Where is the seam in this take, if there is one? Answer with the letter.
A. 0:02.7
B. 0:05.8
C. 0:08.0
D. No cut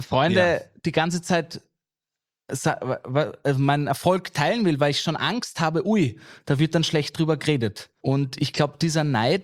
C